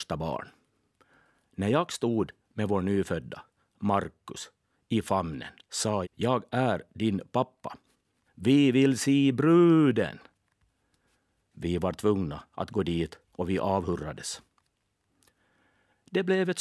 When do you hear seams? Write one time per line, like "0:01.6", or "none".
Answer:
0:06.0
0:08.3